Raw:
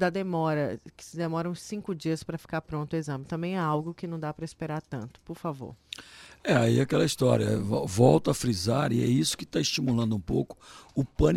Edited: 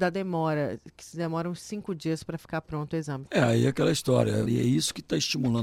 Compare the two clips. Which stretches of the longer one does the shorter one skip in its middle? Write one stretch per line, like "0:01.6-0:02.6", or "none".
0:03.3-0:06.4
0:07.6-0:08.9